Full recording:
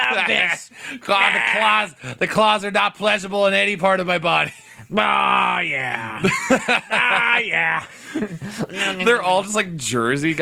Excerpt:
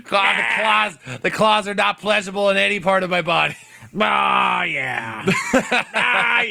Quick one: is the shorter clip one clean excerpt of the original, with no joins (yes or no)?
yes